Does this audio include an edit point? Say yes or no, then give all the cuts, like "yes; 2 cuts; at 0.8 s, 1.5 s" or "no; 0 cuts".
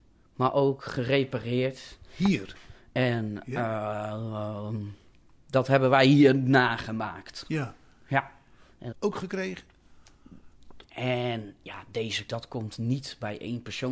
yes; 3 cuts; at 8.9 s, 10.8 s, 12.3 s